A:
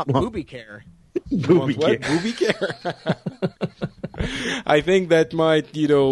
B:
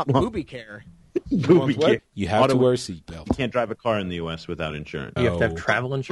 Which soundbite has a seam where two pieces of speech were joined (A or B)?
B